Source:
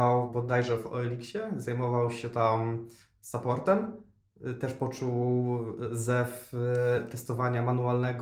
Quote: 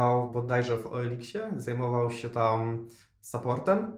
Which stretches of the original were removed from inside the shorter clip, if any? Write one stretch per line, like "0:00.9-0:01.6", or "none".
none